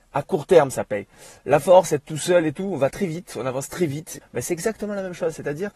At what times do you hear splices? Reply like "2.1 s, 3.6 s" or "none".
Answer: 4.2 s